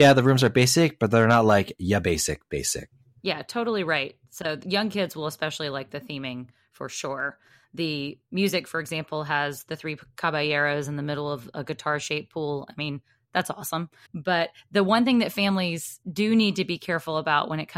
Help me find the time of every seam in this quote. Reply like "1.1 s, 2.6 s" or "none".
14.1 s, 16.0 s